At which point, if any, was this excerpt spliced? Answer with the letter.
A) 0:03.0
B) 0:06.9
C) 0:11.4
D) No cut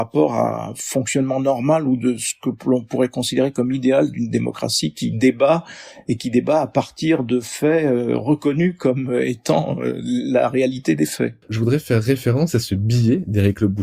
C